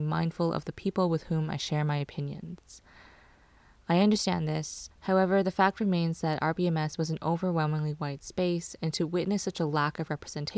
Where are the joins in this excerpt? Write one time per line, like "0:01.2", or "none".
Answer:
0:04.9